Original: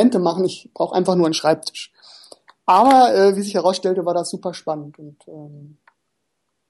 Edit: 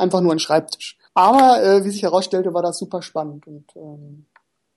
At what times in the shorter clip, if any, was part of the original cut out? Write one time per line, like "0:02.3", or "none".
0:01.1